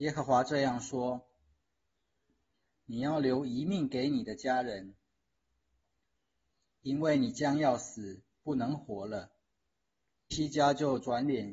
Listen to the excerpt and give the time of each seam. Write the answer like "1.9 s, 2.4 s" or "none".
10.3 s